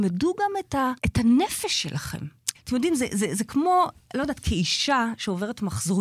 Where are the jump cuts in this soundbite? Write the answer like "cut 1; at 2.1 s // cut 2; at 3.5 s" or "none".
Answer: cut 1; at 1.0 s // cut 2; at 2.5 s